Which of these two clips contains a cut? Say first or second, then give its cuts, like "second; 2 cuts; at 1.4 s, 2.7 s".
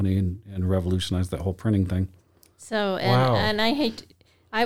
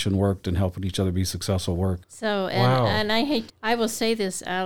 second; 2 cuts; at 2.0 s, 3.5 s